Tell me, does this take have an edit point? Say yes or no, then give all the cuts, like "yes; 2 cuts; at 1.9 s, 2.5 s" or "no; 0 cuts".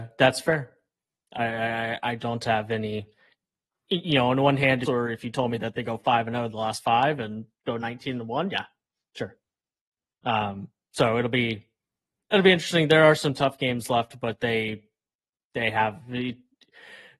yes; 1 cut; at 4.8 s